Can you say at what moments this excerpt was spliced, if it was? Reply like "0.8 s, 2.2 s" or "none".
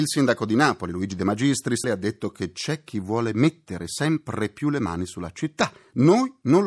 1.8 s